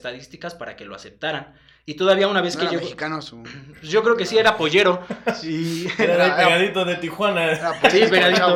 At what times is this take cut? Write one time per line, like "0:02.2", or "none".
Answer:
none